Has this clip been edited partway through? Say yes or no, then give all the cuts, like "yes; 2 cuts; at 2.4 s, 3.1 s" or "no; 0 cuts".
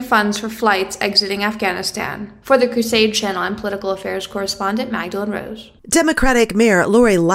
yes; 2 cuts; at 2.4 s, 5.8 s